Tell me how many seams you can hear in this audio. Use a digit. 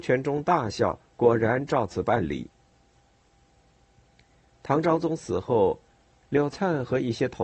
1